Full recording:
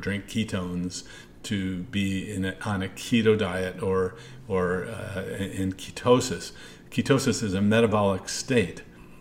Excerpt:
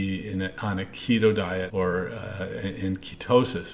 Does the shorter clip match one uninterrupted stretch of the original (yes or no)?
no